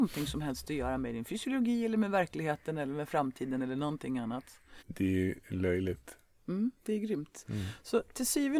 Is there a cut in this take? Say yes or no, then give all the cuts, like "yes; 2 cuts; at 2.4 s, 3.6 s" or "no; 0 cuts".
yes; 2 cuts; at 4.8 s, 6.4 s